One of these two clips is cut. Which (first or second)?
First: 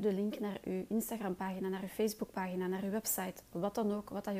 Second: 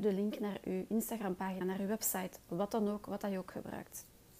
second